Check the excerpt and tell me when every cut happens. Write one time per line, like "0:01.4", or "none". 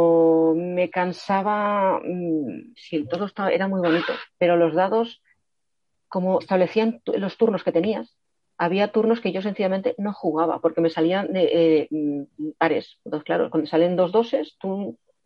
0:02.8
0:06.4
0:12.6